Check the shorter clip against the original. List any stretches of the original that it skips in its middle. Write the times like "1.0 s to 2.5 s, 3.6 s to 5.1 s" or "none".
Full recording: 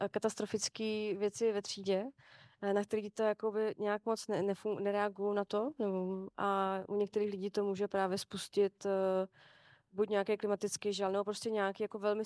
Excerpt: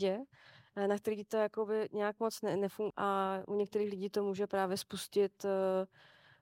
4.8 s to 6.3 s